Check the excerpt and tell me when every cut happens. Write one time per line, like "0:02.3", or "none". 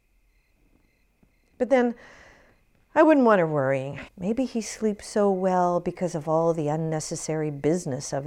0:04.1

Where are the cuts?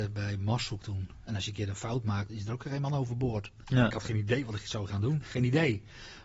0:01.3
0:02.3
0:03.6

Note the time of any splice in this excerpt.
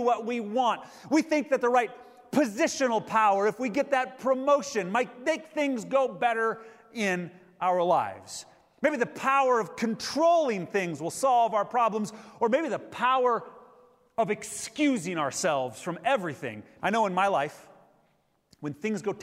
0:16.8

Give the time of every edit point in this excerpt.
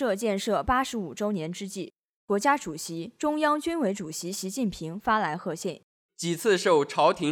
0:02.2
0:06.1

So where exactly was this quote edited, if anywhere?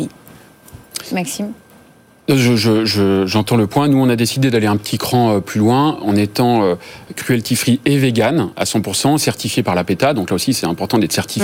none

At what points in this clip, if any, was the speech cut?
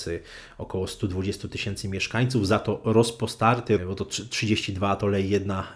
0:03.8

